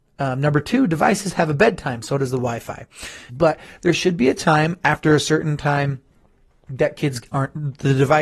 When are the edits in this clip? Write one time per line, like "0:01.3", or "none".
0:03.3

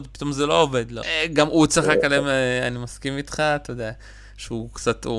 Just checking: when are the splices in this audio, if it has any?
0:01.0

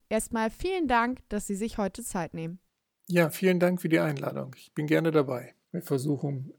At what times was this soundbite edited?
0:05.6

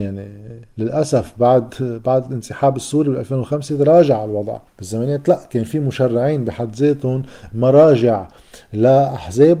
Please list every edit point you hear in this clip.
0:04.7

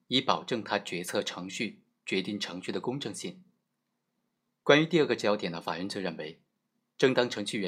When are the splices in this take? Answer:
none

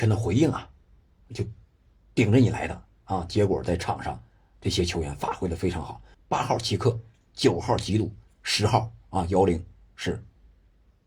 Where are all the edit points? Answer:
0:06.1

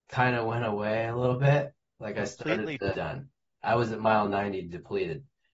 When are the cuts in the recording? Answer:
0:02.9

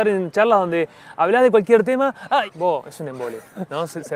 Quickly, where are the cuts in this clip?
0:02.5

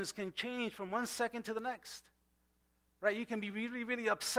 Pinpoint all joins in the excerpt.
none

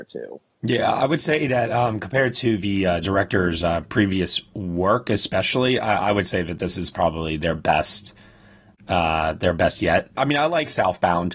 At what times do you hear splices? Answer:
0:10.1

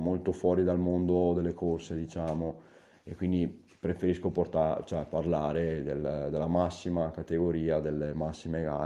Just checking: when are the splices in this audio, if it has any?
none

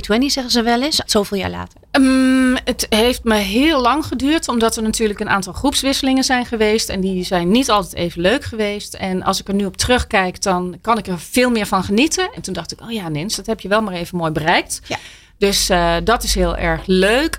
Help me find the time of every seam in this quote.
0:01.1
0:12.4

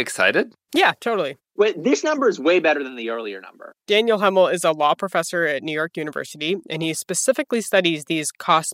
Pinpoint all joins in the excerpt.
none

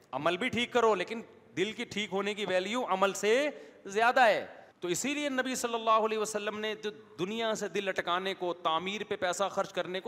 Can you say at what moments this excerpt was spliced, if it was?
0:04.7

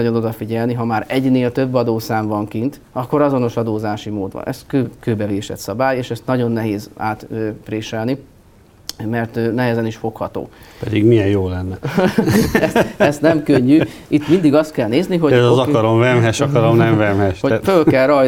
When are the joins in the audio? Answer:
none

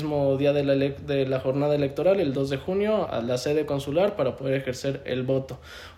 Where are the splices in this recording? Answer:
0:03.1

